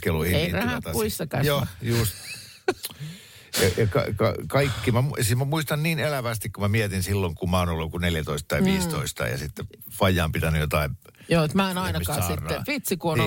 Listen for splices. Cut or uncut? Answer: uncut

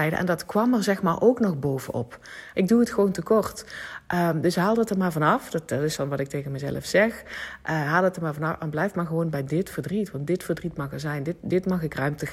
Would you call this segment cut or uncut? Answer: cut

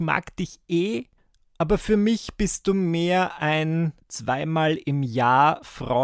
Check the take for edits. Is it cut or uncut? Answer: uncut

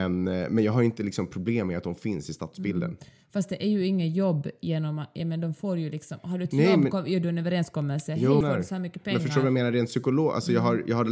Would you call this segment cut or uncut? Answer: cut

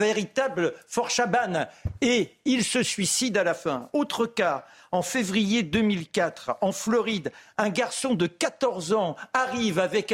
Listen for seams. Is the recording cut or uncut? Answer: uncut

